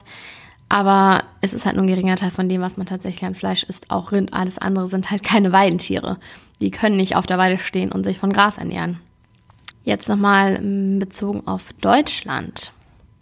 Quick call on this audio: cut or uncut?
cut